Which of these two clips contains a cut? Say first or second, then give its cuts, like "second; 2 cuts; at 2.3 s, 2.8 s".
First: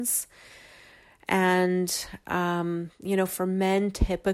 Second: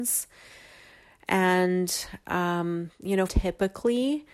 second; 1 cut; at 3.3 s